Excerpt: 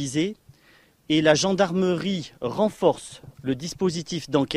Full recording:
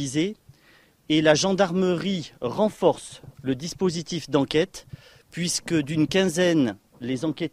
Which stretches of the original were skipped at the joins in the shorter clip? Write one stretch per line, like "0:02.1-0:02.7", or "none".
none

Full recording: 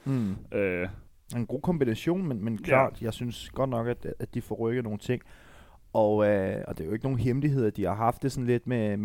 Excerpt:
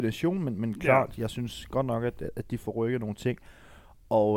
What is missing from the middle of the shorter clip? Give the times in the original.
none

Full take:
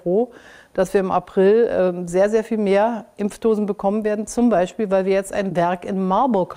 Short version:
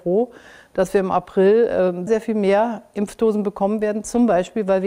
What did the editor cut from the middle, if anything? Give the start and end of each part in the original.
0:02.1-0:02.3

